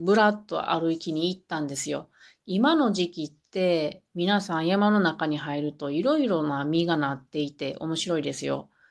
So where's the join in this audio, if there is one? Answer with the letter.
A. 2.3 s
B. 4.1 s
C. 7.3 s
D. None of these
D